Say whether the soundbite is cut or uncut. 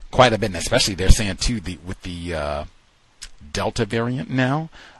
uncut